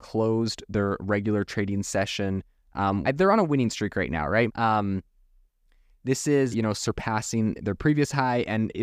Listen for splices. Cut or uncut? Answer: cut